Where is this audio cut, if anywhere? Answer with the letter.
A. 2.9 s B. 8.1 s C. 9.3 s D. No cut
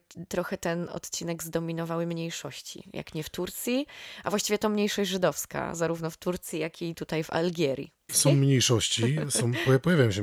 B